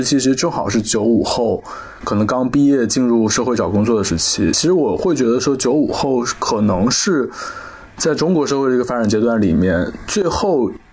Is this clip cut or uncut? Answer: uncut